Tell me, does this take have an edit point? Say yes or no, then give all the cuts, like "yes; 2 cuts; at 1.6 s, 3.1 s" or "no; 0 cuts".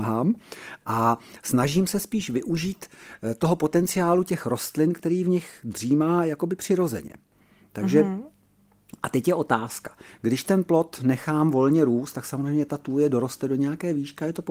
no; 0 cuts